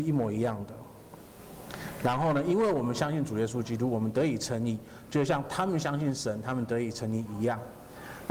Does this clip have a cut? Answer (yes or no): no